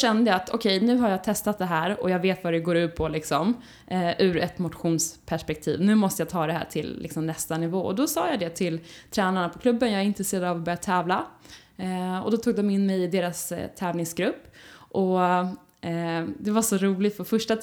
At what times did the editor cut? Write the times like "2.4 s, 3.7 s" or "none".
none